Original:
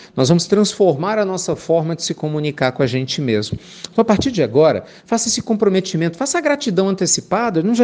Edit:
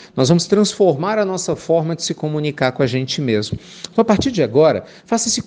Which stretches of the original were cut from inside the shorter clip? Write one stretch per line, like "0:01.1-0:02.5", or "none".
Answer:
none